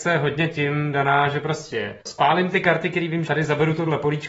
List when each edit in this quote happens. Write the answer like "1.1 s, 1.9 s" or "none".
2.0 s, 3.3 s